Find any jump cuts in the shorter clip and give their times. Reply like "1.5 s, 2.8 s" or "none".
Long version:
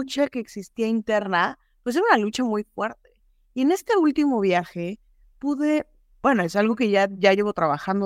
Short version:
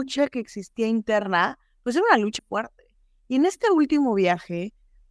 2.4 s